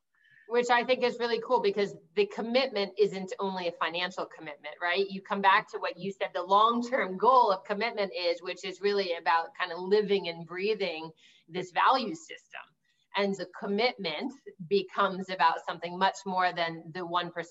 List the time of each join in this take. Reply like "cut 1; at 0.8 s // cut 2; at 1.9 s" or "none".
cut 1; at 13.4 s